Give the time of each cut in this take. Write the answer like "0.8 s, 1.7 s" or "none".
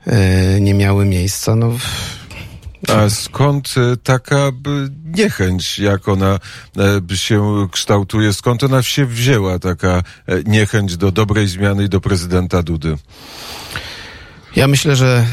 2.9 s